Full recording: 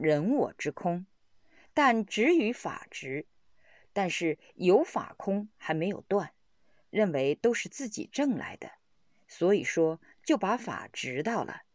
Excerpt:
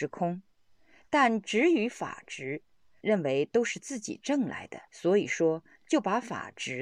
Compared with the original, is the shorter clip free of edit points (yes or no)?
no